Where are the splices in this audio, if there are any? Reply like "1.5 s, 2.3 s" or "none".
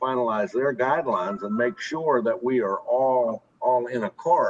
3.5 s